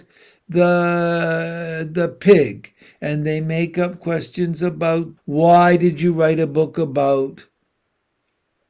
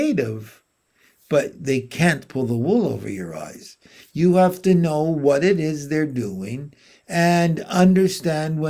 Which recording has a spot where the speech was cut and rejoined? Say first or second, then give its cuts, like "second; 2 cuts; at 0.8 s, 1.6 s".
first; 1 cut; at 5.2 s